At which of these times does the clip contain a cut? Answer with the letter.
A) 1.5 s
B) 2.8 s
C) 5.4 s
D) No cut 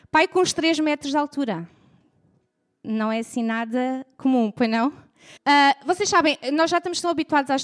C